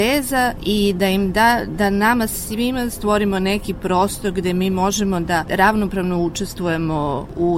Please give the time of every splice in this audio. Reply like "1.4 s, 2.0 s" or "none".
none